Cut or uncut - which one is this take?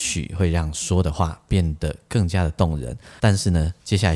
cut